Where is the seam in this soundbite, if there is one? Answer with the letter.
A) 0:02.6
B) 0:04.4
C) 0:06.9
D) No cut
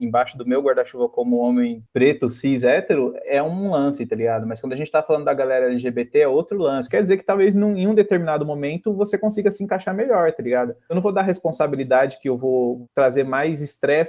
C